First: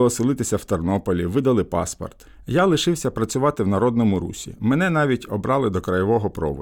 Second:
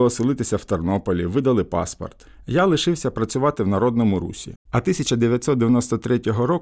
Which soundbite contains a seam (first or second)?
second